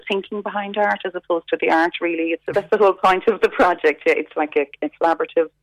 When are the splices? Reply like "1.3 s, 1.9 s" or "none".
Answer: 2.5 s